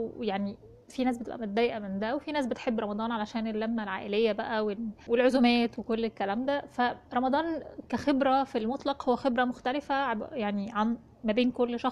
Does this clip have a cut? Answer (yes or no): yes